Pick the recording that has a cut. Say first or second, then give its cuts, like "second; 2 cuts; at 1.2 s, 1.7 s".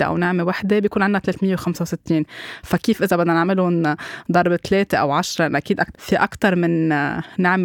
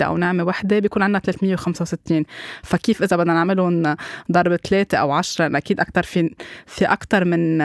first; 1 cut; at 5.9 s